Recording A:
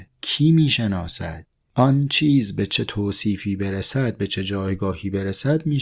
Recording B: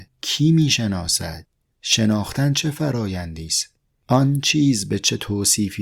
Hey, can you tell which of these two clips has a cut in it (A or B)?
A